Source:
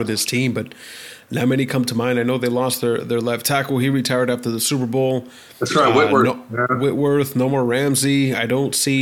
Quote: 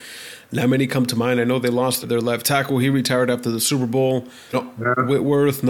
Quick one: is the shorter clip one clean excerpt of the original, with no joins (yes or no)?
no